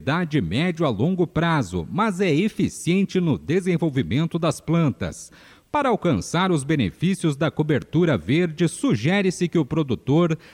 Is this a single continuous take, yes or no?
yes